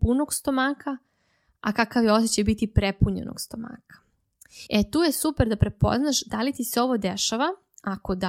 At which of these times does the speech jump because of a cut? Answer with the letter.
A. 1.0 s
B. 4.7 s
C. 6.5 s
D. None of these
B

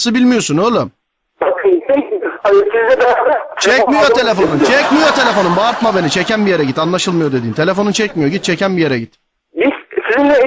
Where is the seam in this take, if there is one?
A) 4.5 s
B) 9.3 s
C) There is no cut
C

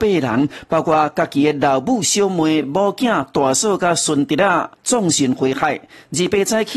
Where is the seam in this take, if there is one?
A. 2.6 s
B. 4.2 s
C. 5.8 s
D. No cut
D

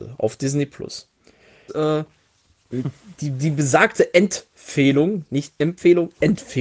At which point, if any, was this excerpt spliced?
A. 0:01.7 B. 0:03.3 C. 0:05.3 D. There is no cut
A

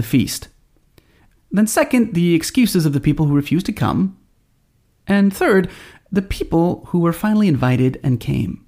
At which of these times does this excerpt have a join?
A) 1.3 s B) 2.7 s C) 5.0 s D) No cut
A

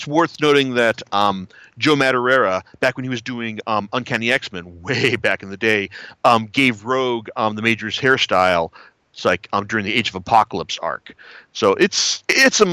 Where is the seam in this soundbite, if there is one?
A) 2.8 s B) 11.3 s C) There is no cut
C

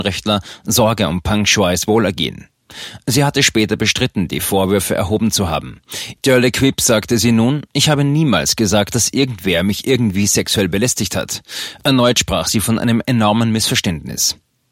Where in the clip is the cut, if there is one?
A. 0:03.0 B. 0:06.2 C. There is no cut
B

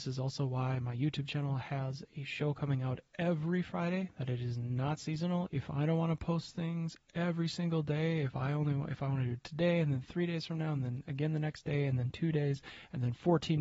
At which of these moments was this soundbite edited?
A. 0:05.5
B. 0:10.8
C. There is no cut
A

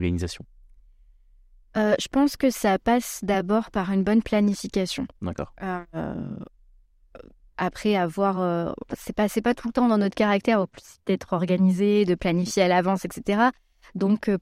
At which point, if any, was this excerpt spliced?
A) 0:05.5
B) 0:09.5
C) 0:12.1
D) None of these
D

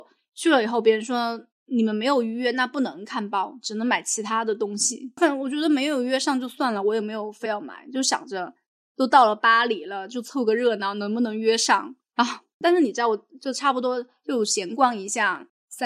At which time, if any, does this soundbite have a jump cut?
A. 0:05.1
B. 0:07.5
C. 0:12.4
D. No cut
B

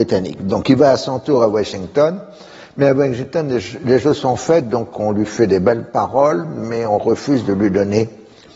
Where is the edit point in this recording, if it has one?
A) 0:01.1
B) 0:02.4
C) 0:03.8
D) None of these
D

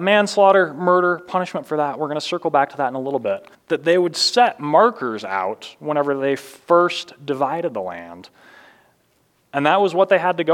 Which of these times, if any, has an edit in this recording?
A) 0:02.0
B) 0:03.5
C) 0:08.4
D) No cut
B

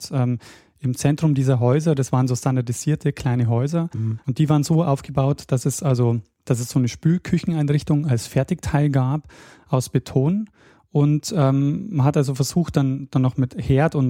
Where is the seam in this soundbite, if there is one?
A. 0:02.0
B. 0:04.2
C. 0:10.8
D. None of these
B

